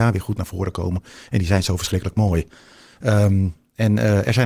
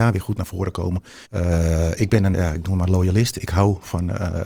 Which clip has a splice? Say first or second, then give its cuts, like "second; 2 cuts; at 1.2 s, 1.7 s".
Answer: second; 2 cuts; at 1.2 s, 2.3 s